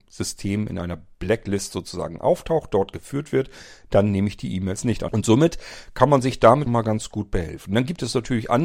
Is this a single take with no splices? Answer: no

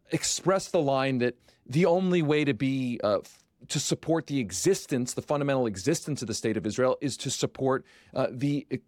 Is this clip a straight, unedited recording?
yes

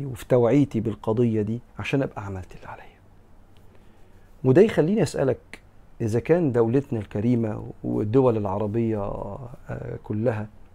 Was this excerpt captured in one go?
no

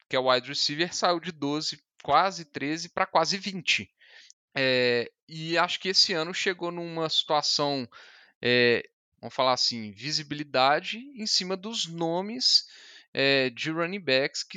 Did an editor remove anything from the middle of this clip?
yes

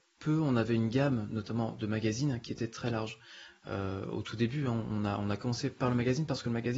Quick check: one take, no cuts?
yes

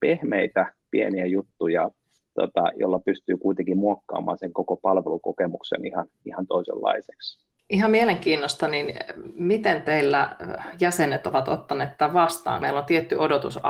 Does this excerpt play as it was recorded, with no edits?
yes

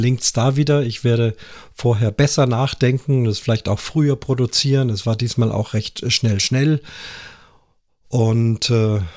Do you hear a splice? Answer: no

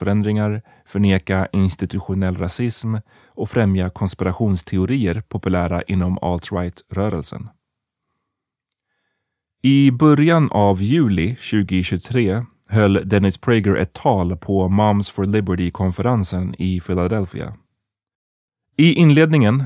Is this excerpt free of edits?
yes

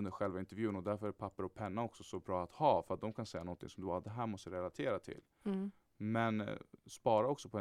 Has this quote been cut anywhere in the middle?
no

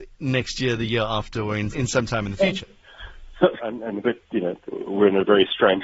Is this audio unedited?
no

